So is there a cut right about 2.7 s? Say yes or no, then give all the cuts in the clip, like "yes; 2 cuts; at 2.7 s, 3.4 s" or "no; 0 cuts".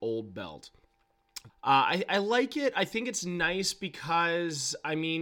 no; 1 cut; at 1.5 s